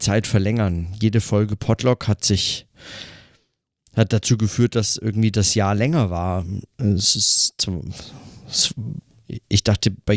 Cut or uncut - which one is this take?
uncut